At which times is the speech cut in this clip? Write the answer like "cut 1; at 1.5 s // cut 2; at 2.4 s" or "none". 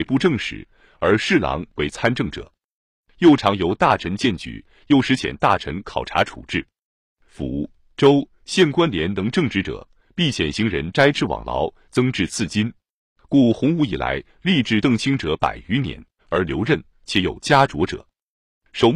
cut 1; at 13.2 s // cut 2; at 16.2 s